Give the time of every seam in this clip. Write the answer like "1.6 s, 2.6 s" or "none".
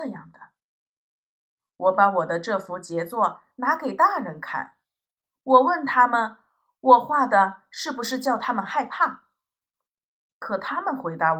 none